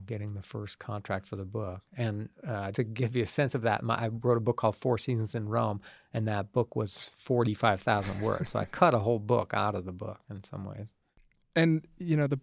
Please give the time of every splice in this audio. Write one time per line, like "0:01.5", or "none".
0:02.7